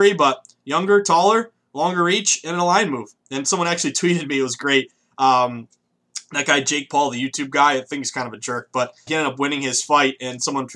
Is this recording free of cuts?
no; 1 cut; at 9.1 s

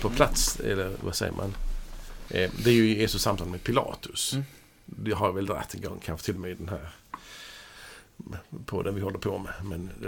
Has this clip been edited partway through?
yes; 1 cut; at 2.3 s

